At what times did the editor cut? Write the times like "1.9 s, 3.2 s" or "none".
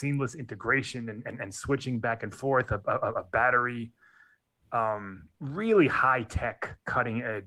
5.3 s